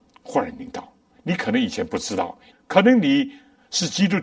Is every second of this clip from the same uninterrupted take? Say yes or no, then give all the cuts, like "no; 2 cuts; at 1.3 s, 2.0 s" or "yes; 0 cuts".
no; 2 cuts; at 1.1 s, 2.5 s